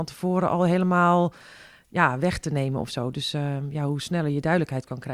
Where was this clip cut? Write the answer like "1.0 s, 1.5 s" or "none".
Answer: none